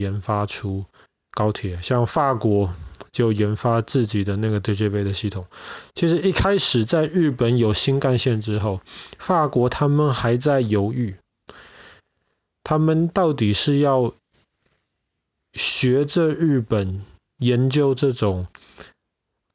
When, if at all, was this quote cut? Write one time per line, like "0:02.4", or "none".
none